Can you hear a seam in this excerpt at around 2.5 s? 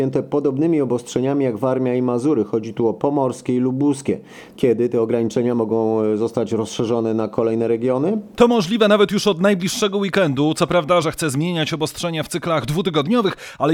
no; 2 cuts; at 4.6 s, 11.0 s

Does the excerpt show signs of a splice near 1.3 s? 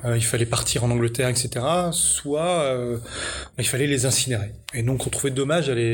no; 0 cuts

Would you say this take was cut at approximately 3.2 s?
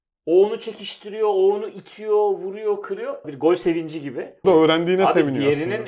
yes; 2 cuts; at 3.2 s, 4.4 s

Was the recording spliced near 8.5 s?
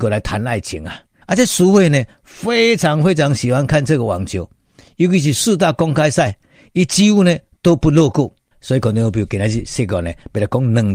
yes; 2 cuts; at 1.2 s, 8.5 s

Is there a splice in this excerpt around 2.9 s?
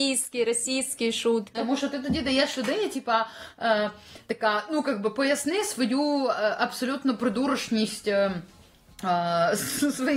no; 1 cut; at 1.5 s

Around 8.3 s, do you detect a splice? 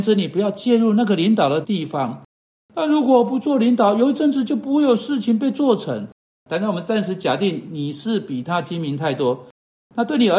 no; 2 cuts; at 1.6 s, 6.4 s

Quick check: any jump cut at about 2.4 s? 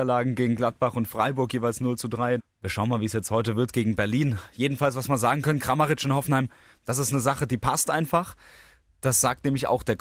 yes; 1 cut; at 2.4 s

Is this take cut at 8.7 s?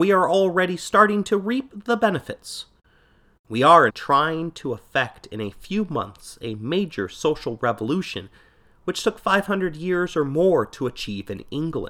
no; 1 cut; at 3.9 s

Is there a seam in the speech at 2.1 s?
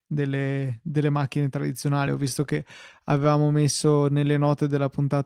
no; 0 cuts

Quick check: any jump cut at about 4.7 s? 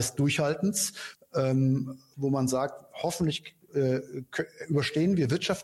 no; 1 cut; at 1.1 s

